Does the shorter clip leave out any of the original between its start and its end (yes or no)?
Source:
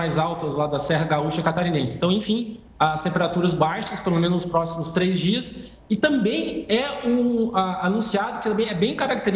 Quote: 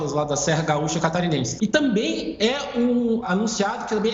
yes